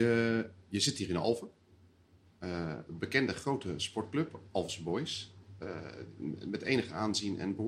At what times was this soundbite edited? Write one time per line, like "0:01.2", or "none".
0:02.9